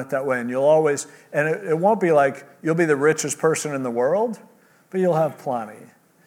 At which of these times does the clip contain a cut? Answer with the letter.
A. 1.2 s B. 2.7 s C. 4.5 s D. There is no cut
D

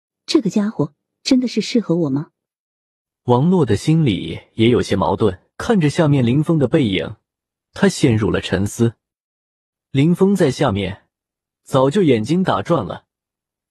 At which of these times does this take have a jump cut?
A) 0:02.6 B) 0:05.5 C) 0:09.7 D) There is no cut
B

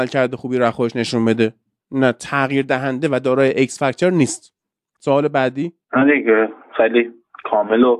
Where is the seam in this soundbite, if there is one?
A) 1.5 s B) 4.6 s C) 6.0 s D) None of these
D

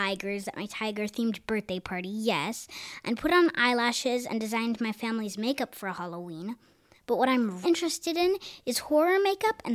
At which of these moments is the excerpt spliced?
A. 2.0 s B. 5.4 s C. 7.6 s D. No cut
C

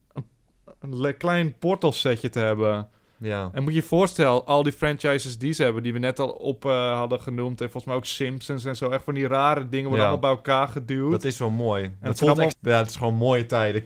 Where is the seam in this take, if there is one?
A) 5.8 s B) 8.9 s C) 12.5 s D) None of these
C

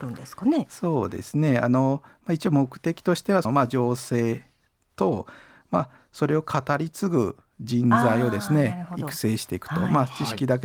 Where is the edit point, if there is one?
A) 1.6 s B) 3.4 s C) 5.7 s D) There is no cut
B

